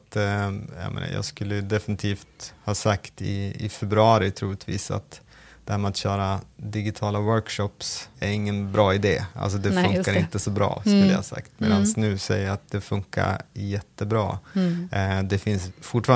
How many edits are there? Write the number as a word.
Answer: one